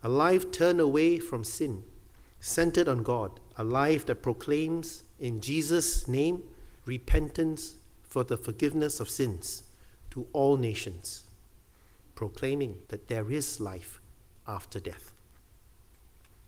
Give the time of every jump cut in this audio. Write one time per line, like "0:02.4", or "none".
0:03.5
0:06.8
0:12.8